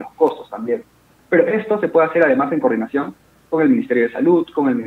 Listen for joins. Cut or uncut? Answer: cut